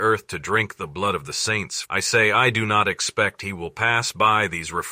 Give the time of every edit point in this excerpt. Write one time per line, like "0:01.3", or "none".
0:01.8

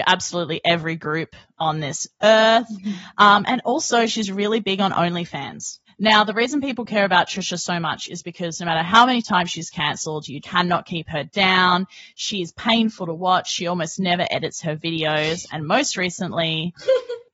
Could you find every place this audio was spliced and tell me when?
0:10.4

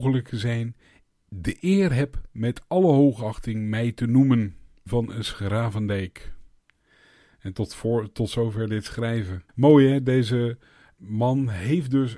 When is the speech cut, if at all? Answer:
0:04.9
0:09.5
0:11.0

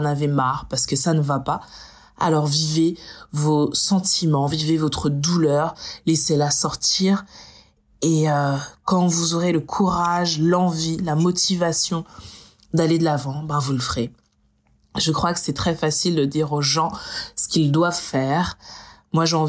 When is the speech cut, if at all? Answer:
none

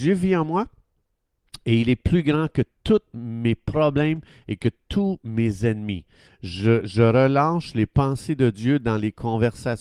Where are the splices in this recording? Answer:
0:06.3

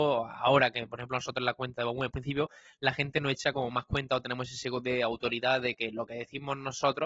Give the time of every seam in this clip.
0:02.1

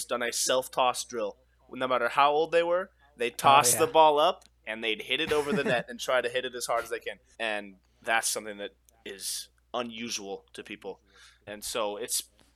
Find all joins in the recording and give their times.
0:07.3
0:11.5

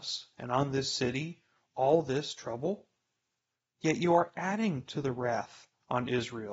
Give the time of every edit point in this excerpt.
none

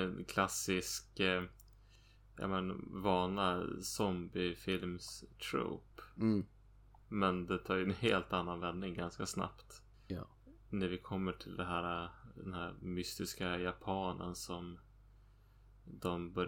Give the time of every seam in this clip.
none

